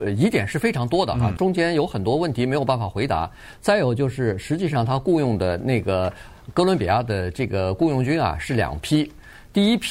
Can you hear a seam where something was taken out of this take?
yes; 1 cut; at 1.4 s

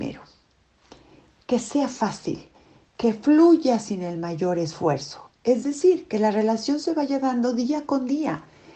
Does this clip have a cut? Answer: no; 0 cuts

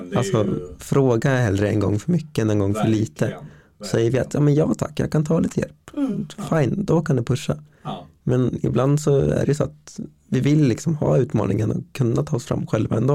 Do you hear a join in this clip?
no; 0 cuts

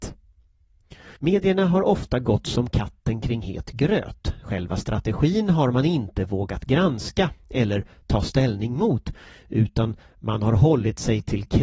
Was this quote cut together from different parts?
yes; 1 cut; at 1.2 s

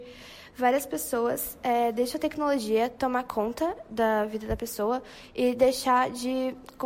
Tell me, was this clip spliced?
no; 0 cuts

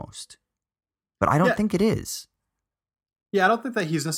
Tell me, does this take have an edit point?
no; 0 cuts

